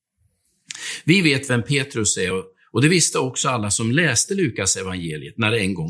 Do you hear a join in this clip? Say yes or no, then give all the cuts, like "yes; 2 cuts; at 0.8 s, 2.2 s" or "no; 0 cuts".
no; 0 cuts